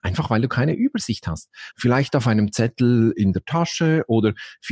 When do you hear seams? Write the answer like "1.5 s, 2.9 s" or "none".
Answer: 1.7 s